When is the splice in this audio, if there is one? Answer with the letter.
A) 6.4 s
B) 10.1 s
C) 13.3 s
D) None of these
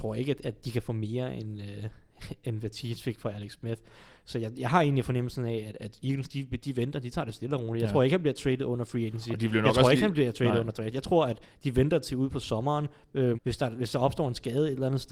C